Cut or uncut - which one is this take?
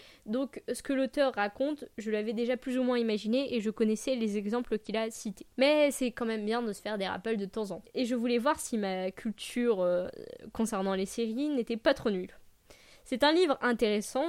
uncut